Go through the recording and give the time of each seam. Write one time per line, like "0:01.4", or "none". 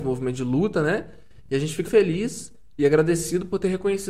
0:01.8